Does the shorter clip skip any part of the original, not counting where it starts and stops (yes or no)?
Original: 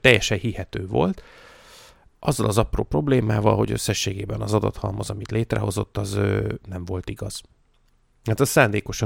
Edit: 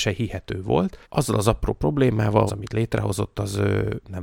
yes